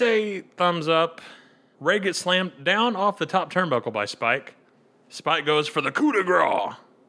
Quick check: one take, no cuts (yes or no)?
no